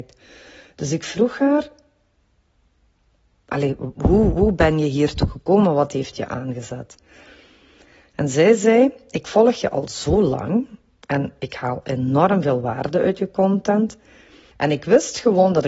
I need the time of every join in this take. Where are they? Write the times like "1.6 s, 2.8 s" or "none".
3.9 s, 14.5 s